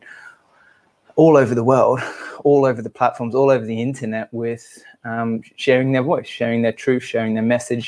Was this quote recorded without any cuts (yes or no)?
yes